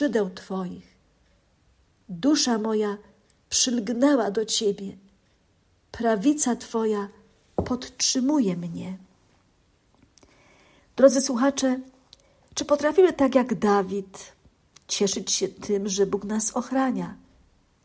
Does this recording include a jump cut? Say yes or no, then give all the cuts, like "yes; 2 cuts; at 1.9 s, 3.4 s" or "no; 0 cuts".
no; 0 cuts